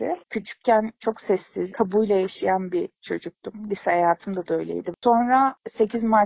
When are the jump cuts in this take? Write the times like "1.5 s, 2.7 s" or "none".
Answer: 1.7 s